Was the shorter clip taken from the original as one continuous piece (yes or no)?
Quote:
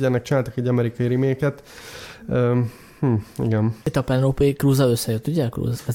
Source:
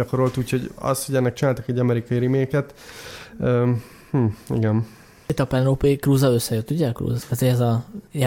no